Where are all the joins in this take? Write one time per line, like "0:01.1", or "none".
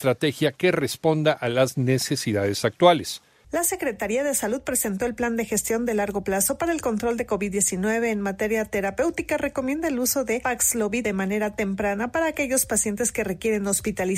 0:03.4